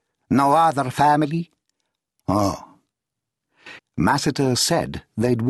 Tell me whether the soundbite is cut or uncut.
cut